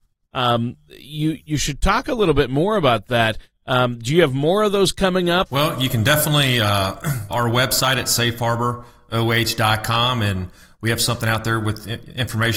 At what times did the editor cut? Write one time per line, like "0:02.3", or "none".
0:05.5
0:07.3